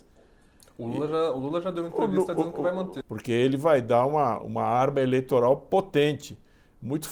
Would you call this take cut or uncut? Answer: cut